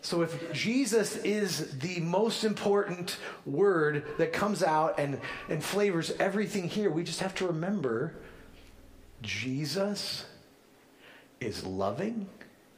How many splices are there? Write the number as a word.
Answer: zero